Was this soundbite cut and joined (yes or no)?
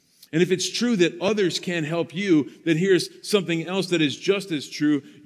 no